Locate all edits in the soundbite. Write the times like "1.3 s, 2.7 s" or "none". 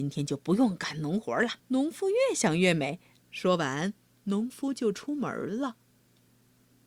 1.6 s, 3.2 s